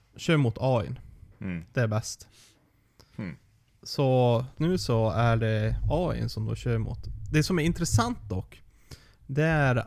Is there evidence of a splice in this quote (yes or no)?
yes